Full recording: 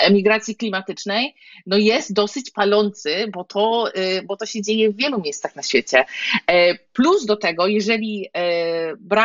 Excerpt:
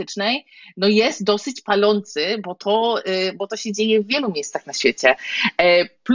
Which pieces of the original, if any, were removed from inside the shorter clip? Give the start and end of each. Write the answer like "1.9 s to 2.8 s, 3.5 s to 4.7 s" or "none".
none